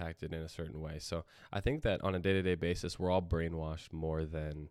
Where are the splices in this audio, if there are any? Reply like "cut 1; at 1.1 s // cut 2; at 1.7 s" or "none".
none